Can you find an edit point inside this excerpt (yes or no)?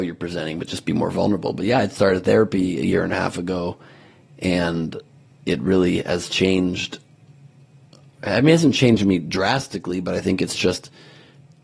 no